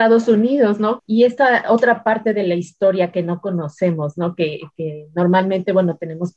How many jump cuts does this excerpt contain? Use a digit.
1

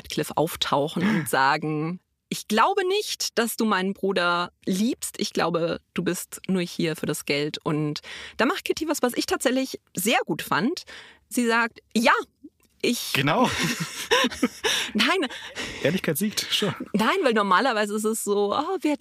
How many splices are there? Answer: 0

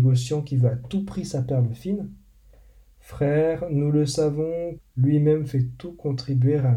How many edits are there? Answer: 1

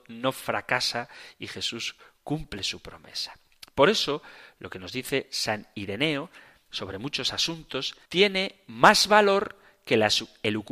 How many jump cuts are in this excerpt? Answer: 1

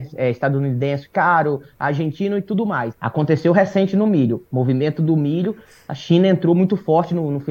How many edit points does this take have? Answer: 1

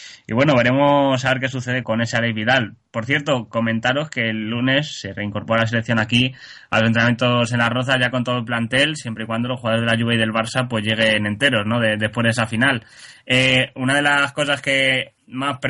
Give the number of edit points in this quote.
1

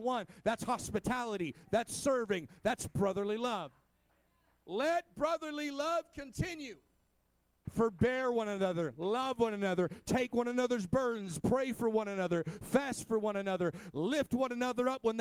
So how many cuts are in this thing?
1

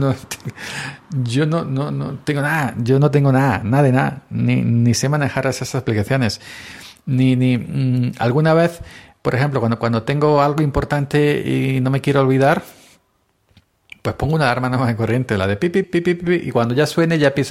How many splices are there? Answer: 1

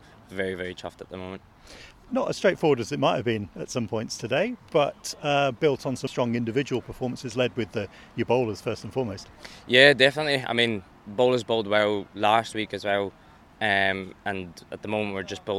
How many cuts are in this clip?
1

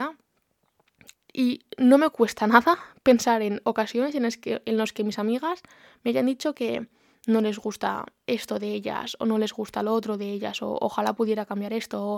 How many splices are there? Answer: 1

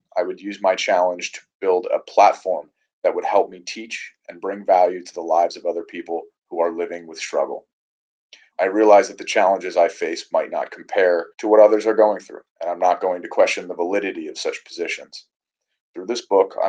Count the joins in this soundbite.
3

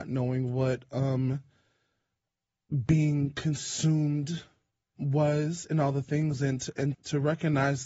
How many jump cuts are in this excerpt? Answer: 2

